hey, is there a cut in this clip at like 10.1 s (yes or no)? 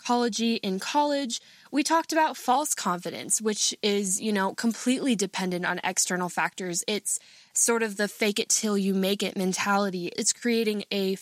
yes